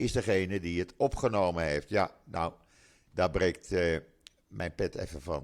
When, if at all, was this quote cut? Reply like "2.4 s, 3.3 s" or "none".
none